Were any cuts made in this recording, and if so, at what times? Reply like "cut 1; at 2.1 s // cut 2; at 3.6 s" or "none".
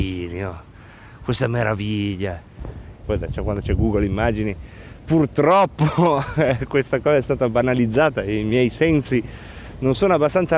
cut 1; at 3.0 s